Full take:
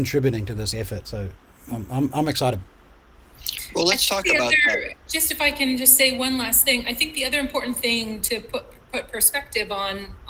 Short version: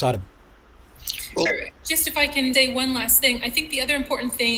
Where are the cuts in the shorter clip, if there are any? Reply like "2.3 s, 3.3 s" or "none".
1.5 s, 2.5 s